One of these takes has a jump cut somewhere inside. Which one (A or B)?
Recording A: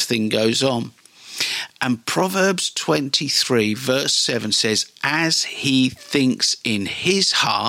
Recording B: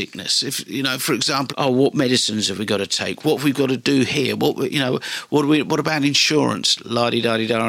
B